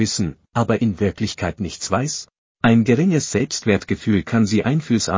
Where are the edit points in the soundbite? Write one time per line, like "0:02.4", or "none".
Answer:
0:02.5